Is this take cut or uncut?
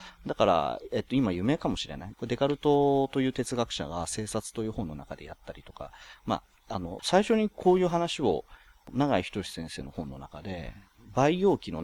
cut